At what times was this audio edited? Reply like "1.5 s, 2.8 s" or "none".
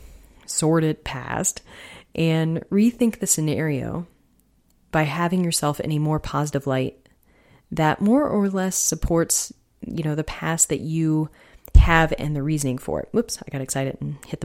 none